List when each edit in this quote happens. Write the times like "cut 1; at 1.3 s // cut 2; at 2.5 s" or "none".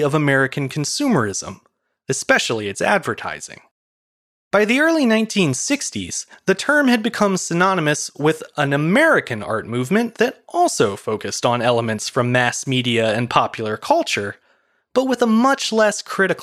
none

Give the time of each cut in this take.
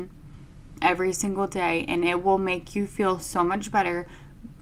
none

